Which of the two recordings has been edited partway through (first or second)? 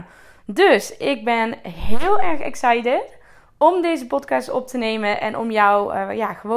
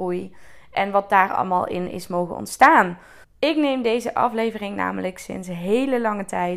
second